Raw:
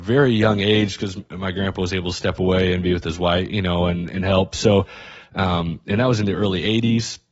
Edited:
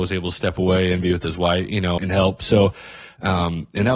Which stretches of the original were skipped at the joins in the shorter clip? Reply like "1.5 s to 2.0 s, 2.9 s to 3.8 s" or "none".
3.8 s to 4.1 s